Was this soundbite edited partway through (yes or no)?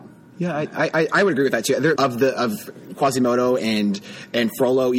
yes